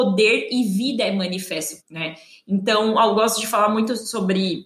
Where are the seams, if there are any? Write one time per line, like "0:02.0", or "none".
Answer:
0:01.8